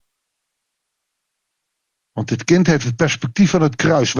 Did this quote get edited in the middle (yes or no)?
no